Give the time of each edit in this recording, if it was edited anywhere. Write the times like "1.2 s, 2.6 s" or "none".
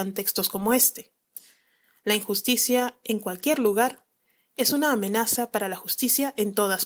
none